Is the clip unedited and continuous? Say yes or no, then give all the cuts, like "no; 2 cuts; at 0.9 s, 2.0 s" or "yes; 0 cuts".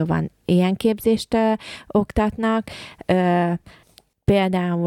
yes; 0 cuts